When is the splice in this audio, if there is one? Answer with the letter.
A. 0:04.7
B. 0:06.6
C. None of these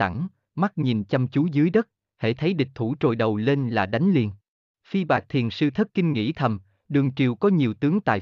A